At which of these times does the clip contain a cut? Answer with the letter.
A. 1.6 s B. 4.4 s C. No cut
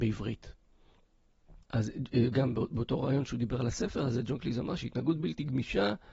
A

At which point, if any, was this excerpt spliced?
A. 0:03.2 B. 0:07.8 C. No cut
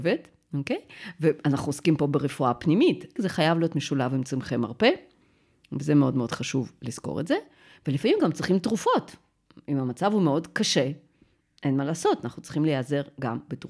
A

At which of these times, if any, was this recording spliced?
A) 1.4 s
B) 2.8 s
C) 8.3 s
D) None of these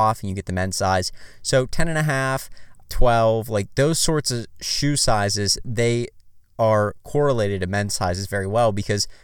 B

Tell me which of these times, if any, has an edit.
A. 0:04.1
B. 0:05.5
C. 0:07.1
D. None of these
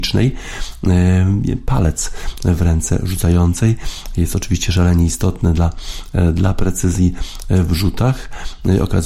D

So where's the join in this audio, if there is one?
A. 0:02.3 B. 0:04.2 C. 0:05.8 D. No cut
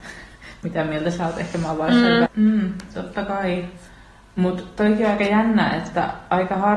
A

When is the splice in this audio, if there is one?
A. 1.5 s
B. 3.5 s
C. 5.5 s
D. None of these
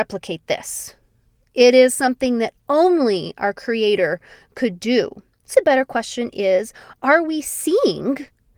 C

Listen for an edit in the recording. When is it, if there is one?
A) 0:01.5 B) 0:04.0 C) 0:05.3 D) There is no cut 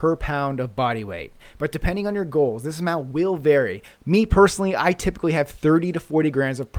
B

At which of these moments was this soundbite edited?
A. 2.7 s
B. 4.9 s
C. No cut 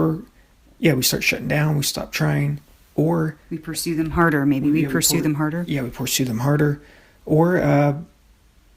C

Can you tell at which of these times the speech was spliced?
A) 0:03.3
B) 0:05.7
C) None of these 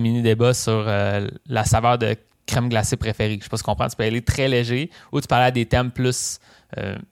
C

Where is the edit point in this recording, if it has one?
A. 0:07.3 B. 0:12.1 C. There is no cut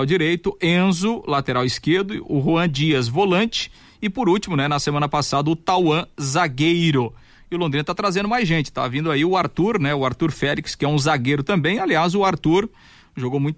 C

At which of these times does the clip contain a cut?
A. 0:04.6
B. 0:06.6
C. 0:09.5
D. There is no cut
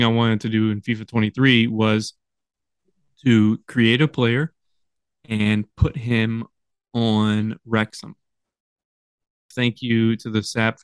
C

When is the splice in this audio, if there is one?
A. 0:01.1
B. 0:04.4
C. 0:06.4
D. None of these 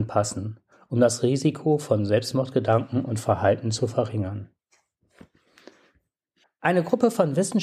C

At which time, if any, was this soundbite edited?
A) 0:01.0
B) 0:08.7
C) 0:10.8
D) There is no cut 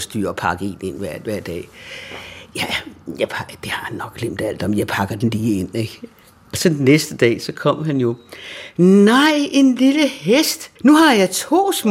C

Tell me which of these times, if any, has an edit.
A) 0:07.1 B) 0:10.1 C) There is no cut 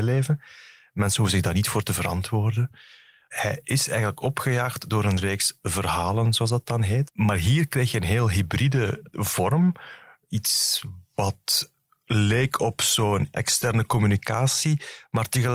A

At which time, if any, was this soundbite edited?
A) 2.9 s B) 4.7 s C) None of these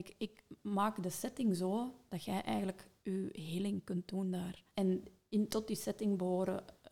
B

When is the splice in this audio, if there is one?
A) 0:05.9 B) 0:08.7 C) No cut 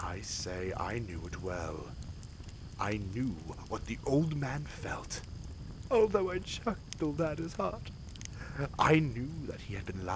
A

